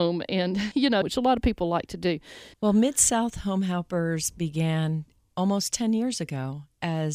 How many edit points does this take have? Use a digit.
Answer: 2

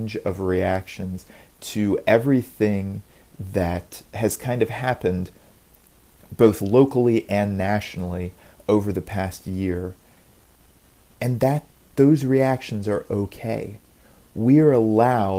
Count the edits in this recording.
0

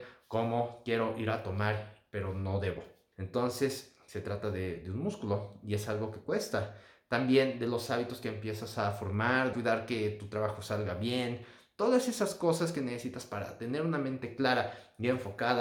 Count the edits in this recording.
2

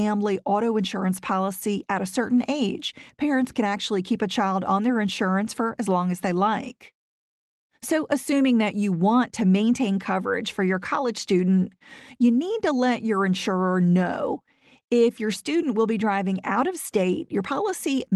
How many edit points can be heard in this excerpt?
0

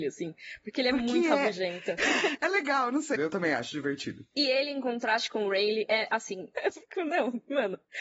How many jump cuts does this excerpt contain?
3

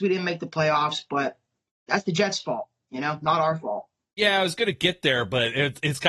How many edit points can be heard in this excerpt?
0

